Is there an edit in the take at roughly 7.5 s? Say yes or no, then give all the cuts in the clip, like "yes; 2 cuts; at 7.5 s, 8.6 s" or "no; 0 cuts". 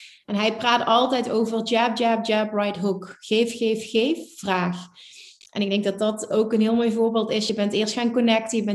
no; 0 cuts